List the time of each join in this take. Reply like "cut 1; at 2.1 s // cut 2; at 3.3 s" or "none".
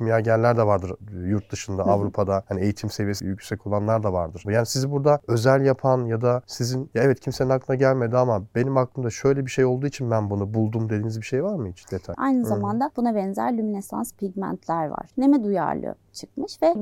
cut 1; at 4.4 s // cut 2; at 12.1 s // cut 3; at 15.1 s